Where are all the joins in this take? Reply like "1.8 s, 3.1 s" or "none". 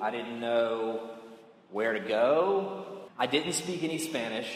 3.1 s